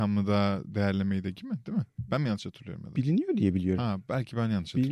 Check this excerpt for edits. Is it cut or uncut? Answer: uncut